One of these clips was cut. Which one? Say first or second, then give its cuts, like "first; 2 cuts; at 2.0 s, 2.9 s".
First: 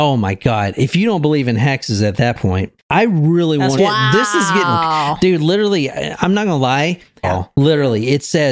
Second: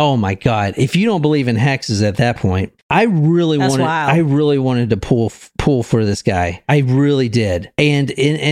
first; 2 cuts; at 3.8 s, 7.2 s